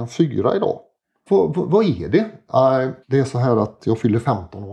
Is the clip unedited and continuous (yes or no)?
no